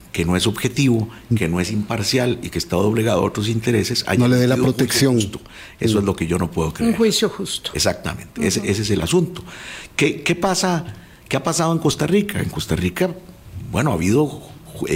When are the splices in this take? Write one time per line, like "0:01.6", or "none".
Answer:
none